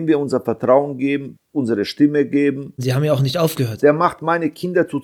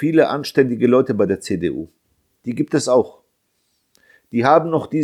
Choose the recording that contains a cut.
first; 3 cuts; at 1.3 s, 2.8 s, 3.8 s

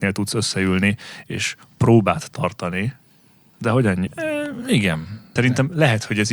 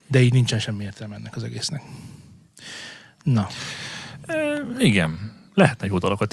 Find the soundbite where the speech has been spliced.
first; 2 cuts; at 4.1 s, 5.4 s

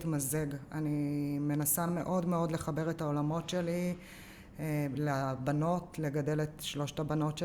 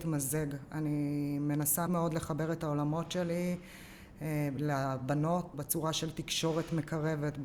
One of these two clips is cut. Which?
second; 2 cuts; at 1.9 s, 5.5 s

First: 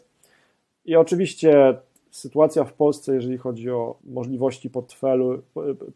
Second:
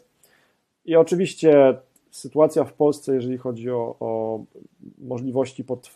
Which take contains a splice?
first; 1 cut; at 4.0 s

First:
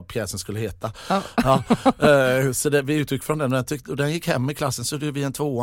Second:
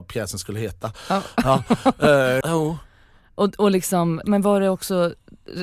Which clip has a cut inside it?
second; 2 cuts; at 2.4 s, 4.2 s

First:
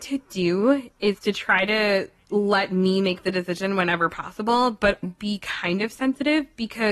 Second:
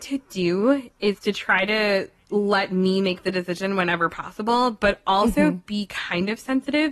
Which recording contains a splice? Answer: first; 1 cut; at 5.0 s

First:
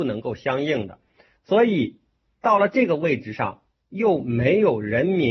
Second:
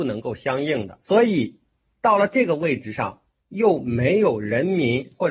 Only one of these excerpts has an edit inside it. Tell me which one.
second; 1 cut; at 1.0 s

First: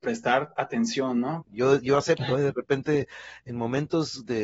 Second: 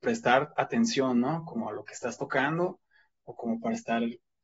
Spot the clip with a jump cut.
first; 1 cut; at 1.4 s

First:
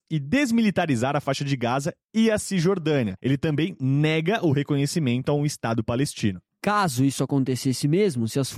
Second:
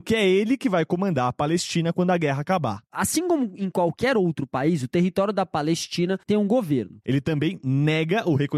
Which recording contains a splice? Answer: second; 2 cuts; at 2.9 s, 7.0 s

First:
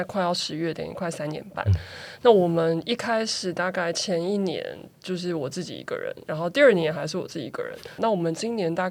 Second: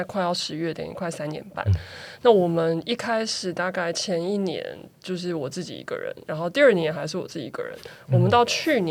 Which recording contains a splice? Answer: first; 1 cut; at 8.0 s

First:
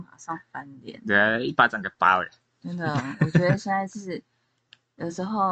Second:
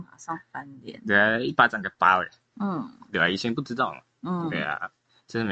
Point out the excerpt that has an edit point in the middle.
second; 1 cut; at 2.5 s

